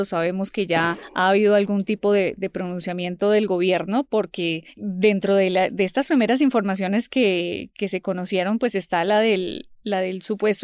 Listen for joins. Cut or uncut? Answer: uncut